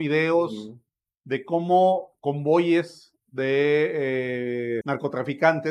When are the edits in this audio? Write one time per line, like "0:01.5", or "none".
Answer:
0:04.8